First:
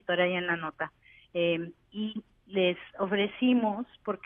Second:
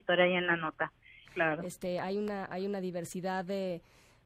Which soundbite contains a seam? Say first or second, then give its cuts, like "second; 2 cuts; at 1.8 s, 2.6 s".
second; 1 cut; at 1.2 s